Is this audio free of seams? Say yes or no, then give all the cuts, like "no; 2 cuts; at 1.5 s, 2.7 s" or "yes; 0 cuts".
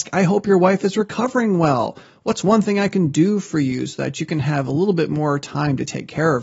yes; 0 cuts